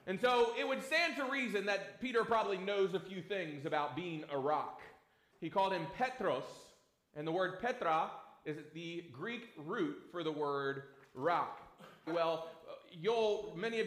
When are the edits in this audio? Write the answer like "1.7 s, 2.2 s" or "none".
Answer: 5.3 s, 12.1 s